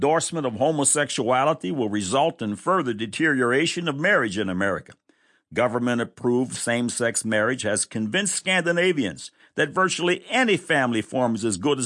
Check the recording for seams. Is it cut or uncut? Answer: uncut